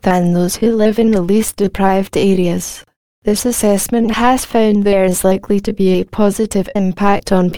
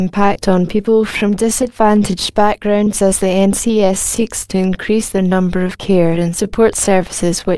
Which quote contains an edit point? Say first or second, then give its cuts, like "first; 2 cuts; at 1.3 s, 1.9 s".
first; 1 cut; at 3.1 s